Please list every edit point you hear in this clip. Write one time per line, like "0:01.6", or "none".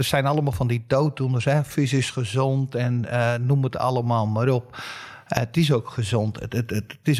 none